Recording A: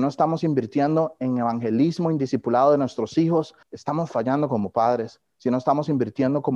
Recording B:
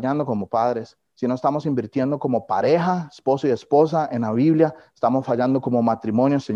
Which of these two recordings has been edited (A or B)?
A